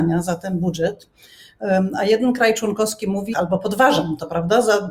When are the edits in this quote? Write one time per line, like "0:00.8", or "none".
0:03.3